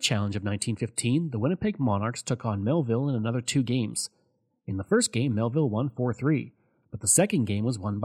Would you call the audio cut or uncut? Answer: uncut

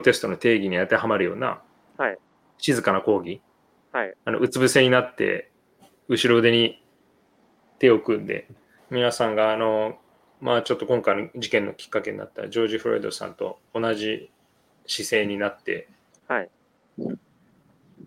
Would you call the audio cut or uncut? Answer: cut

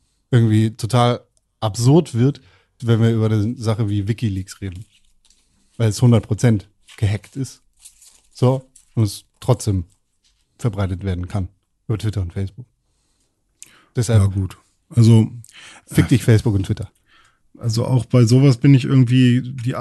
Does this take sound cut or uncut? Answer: cut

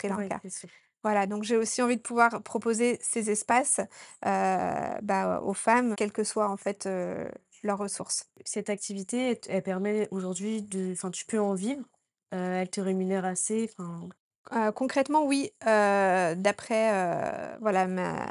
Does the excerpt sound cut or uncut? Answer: cut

